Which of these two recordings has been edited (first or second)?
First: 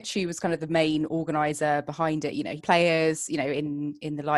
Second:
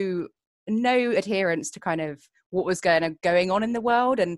first